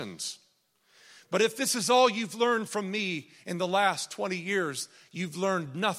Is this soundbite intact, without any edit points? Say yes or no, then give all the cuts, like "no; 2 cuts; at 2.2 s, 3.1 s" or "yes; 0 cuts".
yes; 0 cuts